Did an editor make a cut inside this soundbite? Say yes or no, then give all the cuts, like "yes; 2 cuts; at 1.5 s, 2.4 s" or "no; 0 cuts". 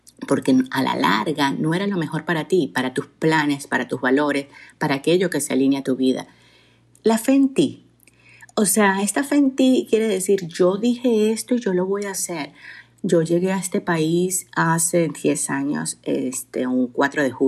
yes; 1 cut; at 12.9 s